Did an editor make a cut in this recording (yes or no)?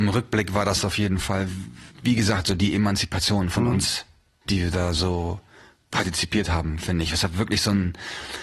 yes